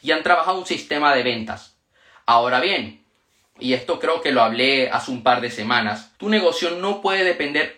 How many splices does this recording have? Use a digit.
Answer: 2